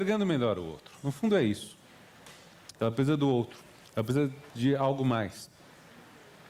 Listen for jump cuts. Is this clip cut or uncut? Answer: cut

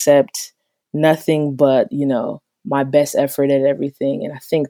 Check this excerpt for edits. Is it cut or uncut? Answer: uncut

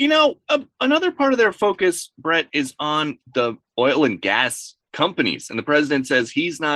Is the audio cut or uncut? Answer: uncut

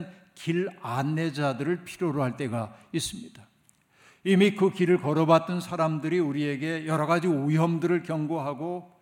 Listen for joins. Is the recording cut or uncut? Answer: uncut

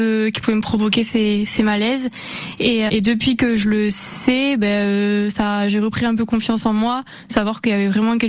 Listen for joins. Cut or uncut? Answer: cut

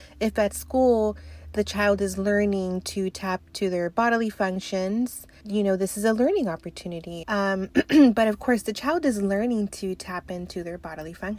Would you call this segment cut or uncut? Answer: cut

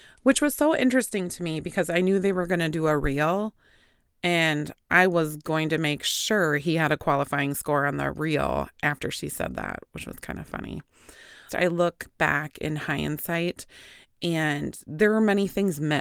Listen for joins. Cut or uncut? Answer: cut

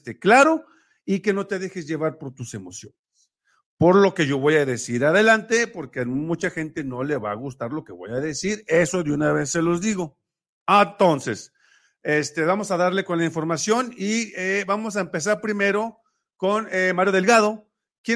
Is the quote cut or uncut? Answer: uncut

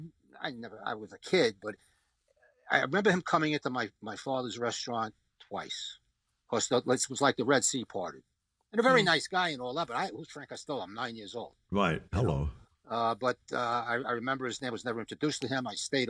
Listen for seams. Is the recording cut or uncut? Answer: uncut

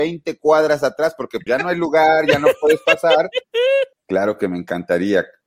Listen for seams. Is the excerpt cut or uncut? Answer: cut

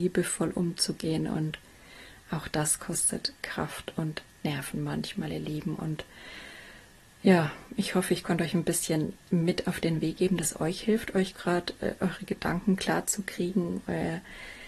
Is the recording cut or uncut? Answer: uncut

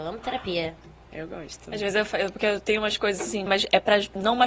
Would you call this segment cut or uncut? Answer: cut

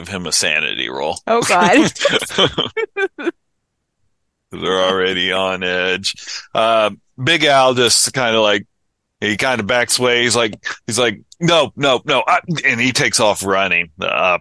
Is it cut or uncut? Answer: uncut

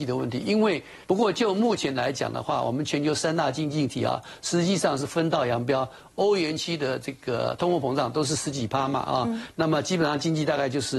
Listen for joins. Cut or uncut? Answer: cut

